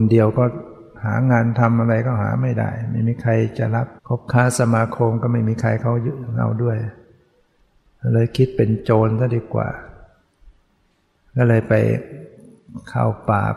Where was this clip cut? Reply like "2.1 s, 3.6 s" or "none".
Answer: 4.0 s